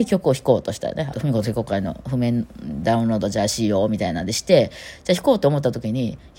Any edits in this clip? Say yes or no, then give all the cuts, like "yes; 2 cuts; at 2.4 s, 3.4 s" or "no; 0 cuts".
yes; 1 cut; at 1.1 s